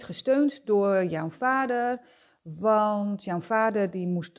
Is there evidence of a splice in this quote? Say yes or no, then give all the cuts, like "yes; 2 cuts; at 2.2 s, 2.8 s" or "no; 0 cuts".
no; 0 cuts